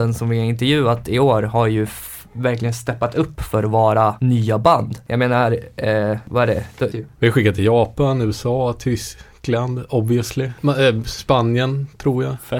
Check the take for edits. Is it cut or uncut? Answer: cut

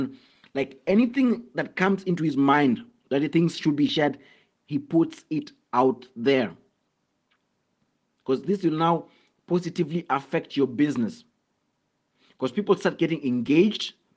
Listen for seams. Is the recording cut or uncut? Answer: cut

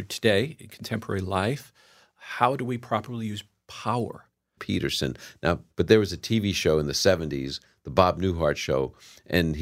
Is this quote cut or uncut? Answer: cut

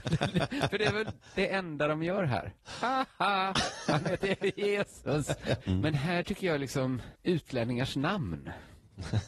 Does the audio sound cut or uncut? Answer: cut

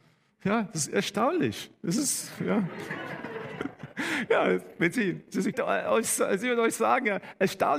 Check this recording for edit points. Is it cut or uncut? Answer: cut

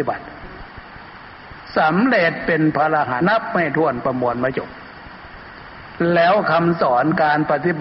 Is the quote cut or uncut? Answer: cut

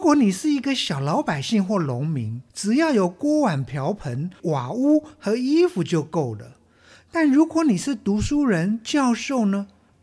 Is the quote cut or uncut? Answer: cut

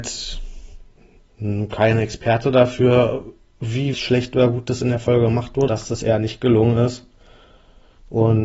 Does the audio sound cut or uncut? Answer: cut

